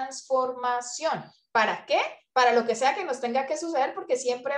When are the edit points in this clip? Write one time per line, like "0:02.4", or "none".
none